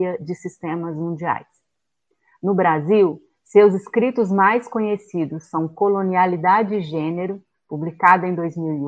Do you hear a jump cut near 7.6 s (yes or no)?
no